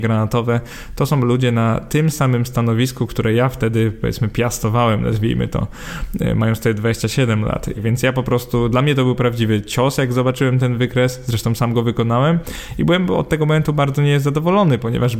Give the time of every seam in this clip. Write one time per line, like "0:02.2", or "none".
0:07.7